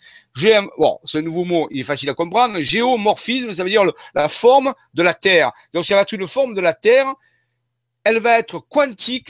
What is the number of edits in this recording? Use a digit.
0